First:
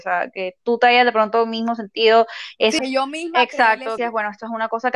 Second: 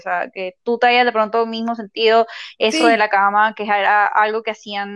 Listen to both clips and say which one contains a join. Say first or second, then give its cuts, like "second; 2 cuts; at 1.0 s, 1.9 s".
first; 2 cuts; at 2.8 s, 4.0 s